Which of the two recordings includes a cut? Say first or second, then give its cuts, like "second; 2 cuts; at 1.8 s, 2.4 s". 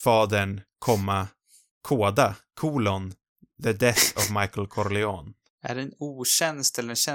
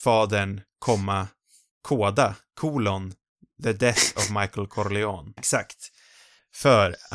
second; 1 cut; at 5.4 s